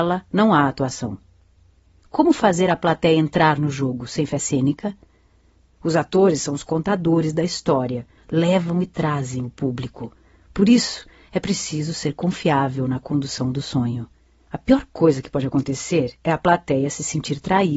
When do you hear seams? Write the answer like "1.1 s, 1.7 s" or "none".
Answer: 8.2 s